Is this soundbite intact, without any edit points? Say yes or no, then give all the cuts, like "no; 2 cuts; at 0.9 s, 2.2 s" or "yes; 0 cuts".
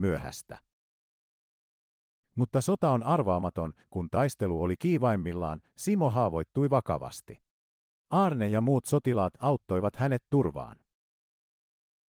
no; 2 cuts; at 3.8 s, 8.0 s